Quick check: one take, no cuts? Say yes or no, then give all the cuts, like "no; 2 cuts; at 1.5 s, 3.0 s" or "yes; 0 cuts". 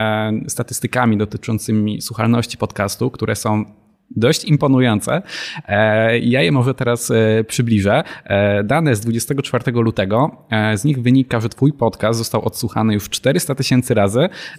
yes; 0 cuts